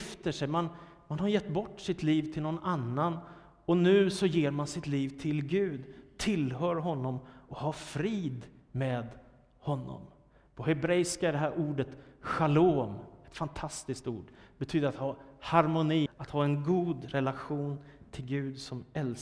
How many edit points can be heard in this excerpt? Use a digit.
1